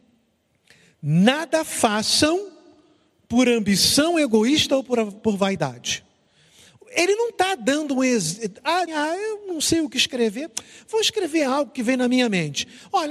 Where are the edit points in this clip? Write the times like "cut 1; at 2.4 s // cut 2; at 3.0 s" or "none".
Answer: cut 1; at 8.9 s